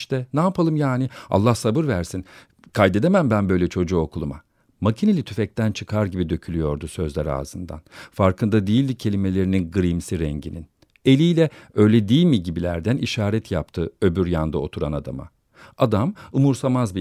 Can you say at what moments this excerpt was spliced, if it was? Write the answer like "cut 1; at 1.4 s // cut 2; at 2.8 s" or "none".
none